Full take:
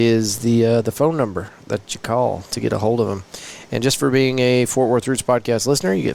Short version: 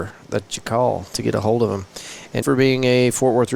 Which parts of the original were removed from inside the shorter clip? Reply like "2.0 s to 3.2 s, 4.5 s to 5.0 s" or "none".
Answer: 3.8 s to 4.0 s